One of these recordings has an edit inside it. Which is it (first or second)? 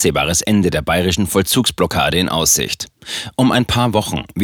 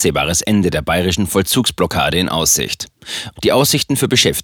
second